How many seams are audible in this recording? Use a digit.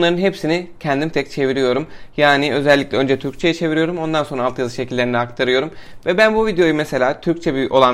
1